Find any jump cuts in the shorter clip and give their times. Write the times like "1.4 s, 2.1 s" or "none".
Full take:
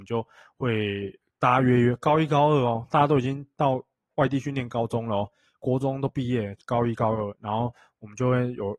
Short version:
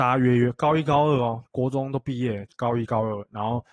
1.4 s